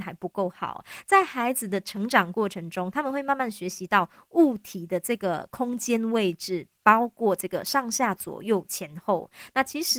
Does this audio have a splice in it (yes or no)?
no